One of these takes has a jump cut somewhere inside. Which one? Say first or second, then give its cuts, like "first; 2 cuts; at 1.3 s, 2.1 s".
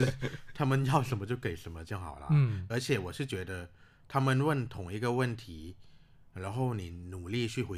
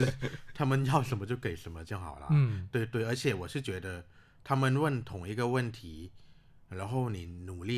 first; 1 cut; at 2.7 s